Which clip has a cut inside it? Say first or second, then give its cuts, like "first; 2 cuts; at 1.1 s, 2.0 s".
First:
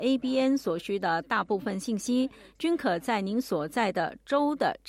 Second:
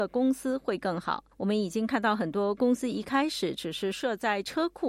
second; 1 cut; at 1.3 s